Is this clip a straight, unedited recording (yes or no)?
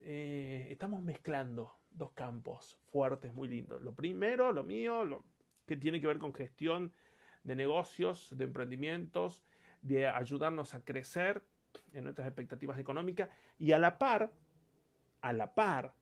yes